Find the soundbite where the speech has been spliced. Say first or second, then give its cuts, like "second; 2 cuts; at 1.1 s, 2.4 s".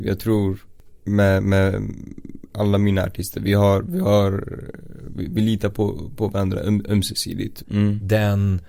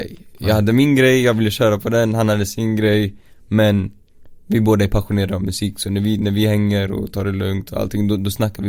first; 1 cut; at 7.6 s